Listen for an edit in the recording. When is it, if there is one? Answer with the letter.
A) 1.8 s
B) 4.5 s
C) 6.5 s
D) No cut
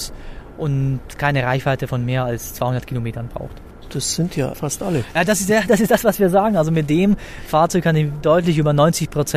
B